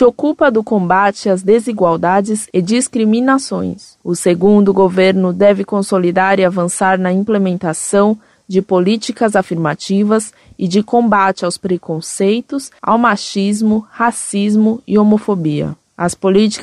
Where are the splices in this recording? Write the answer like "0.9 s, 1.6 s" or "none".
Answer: 4.0 s, 12.8 s